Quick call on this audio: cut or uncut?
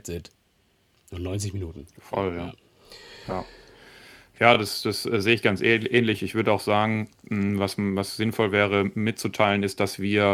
uncut